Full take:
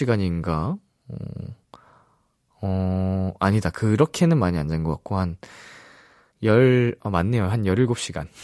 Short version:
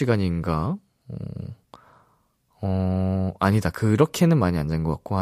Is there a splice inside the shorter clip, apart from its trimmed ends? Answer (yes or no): no